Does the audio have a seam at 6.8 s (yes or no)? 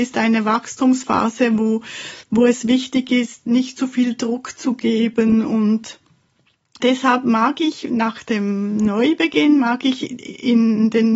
yes